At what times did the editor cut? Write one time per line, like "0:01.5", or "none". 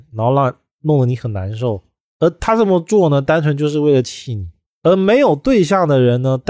none